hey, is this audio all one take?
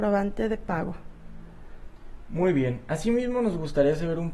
yes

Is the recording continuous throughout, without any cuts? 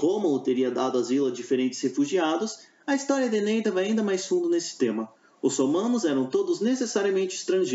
yes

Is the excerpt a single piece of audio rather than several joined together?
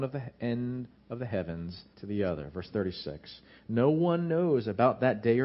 no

